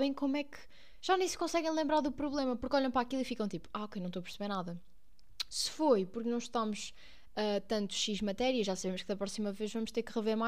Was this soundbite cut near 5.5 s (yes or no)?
yes